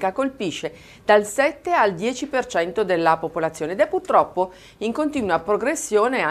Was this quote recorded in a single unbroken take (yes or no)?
yes